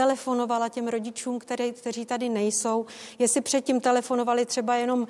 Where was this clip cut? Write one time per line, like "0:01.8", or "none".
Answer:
none